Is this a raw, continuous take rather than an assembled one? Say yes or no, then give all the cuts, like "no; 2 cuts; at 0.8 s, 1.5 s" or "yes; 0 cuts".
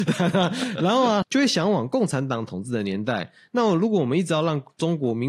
no; 1 cut; at 1.2 s